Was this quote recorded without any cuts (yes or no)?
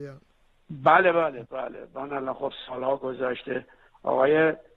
no